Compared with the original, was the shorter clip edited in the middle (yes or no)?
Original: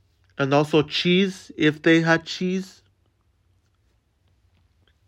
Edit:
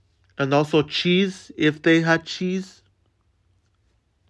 no